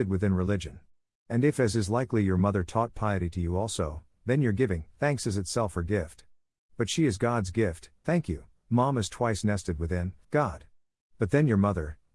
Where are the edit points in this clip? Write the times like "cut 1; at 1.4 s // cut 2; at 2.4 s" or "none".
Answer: cut 1; at 8.0 s // cut 2; at 10.2 s